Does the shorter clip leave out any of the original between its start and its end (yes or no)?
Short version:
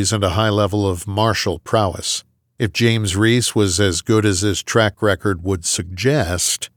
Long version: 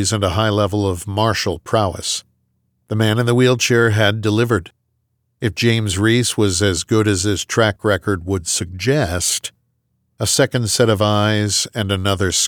yes